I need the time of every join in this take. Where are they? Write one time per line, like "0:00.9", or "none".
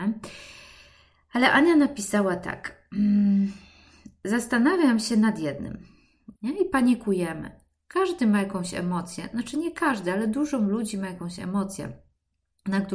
0:06.4